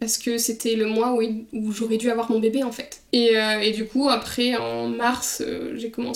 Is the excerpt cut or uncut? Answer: cut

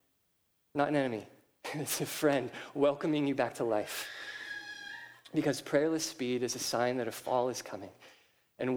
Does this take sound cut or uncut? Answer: uncut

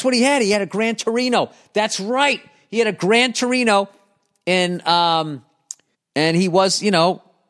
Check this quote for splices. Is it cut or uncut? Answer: cut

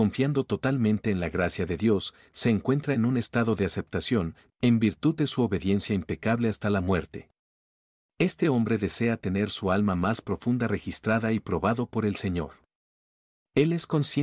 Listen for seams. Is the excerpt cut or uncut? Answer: cut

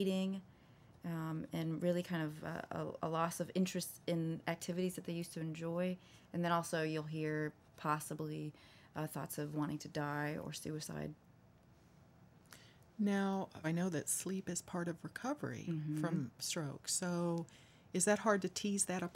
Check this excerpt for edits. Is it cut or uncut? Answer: cut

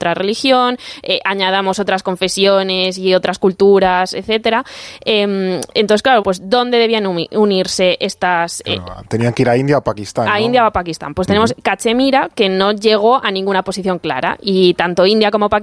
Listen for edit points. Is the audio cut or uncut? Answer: cut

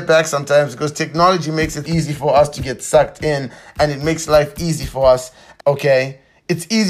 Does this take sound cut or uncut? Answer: cut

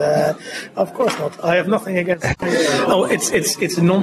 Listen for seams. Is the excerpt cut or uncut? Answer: cut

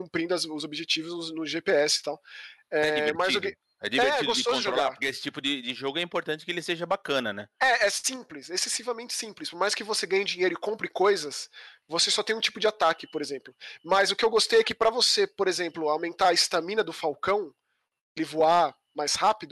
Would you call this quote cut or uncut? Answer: uncut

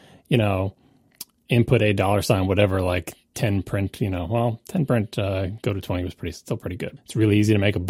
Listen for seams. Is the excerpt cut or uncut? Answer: cut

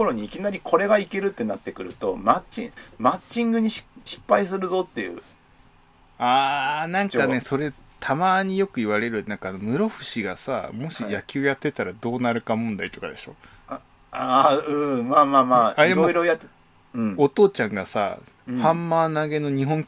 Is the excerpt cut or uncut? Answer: uncut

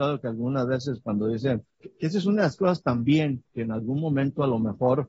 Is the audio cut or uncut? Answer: cut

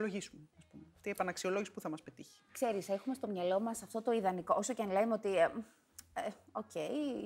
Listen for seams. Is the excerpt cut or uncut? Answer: uncut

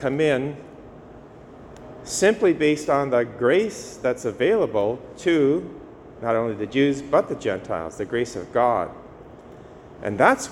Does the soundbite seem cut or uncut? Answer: uncut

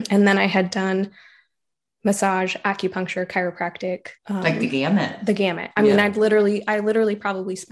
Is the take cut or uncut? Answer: cut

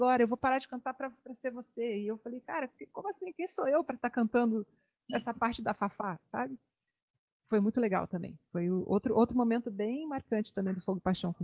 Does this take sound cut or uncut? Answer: uncut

